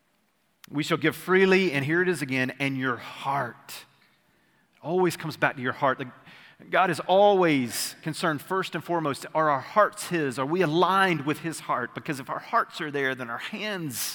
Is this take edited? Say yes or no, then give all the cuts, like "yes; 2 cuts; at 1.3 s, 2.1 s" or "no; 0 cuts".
no; 0 cuts